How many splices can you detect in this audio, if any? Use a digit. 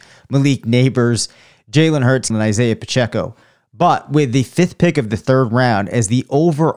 1